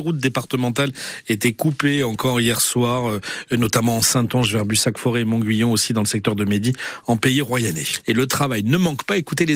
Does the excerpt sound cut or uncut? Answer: cut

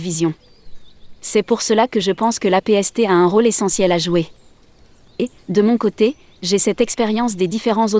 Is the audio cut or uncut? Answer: uncut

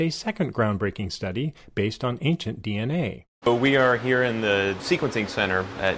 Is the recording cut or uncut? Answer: cut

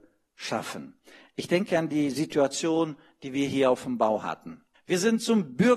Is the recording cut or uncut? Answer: cut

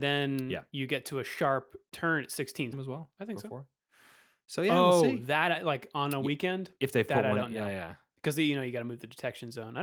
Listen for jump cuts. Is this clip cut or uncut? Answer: cut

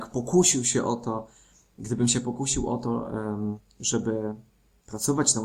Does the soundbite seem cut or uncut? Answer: uncut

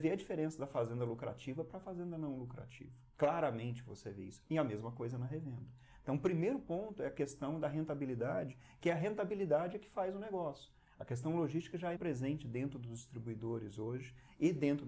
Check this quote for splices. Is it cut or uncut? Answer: cut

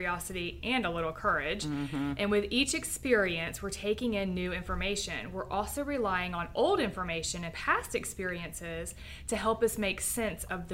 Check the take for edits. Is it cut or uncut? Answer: uncut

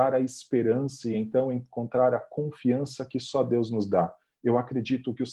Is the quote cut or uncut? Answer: uncut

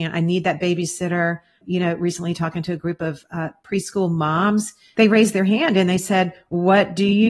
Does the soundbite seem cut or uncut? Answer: uncut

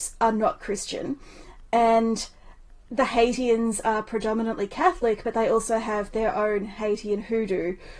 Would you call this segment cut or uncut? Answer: uncut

